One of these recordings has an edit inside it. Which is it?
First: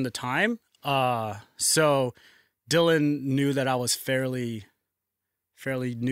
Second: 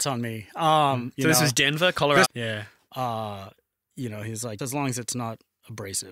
second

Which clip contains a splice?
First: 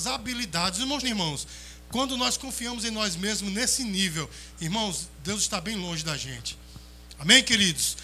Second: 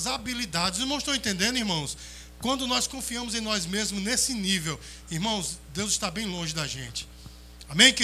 first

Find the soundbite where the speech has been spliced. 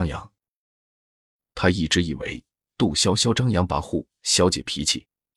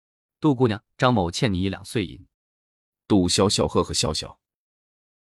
second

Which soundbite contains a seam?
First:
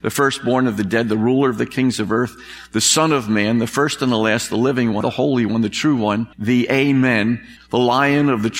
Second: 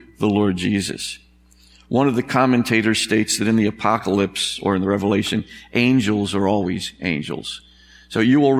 first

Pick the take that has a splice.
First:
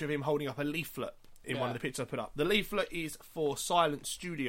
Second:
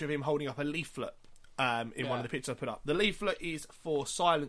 first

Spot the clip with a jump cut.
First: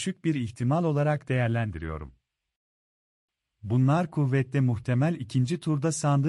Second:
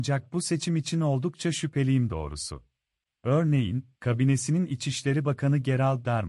second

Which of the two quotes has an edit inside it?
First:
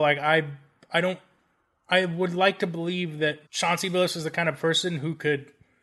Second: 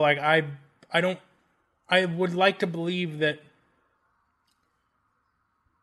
first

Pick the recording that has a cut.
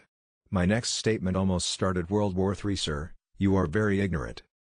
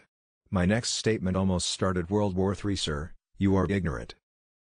second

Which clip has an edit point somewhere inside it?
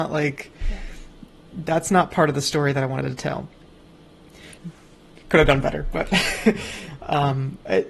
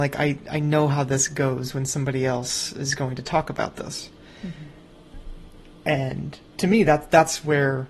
first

